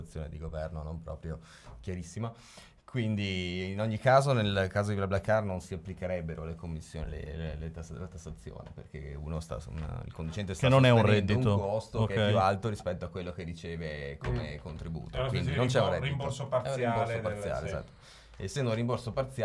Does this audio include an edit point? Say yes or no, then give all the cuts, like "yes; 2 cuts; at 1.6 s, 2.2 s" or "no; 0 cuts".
no; 0 cuts